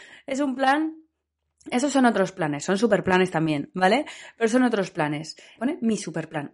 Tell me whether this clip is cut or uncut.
cut